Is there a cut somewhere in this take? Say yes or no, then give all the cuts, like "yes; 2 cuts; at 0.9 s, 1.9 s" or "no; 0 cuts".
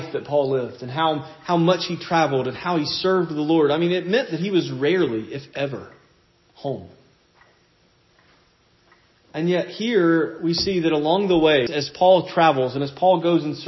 yes; 2 cuts; at 9.1 s, 11.7 s